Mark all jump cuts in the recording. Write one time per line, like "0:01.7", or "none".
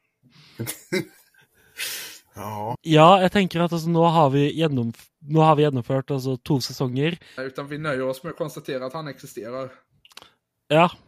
0:02.7
0:07.4